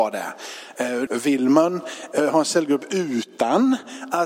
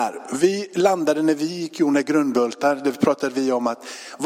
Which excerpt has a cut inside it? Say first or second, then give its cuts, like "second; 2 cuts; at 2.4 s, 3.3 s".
first; 1 cut; at 1.1 s